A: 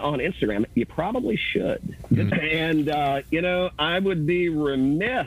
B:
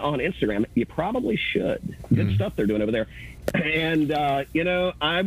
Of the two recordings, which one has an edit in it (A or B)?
A